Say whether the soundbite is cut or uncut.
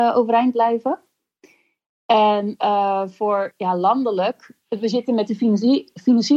uncut